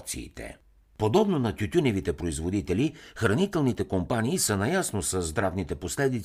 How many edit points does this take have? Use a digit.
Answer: 1